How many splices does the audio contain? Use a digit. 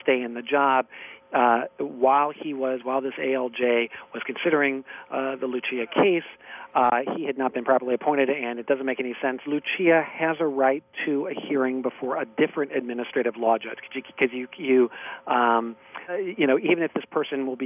2